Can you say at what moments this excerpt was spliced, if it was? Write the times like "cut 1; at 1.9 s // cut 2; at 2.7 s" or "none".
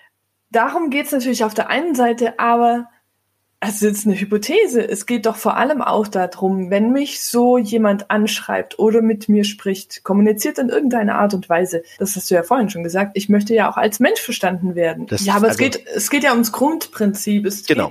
cut 1; at 12.0 s // cut 2; at 15.1 s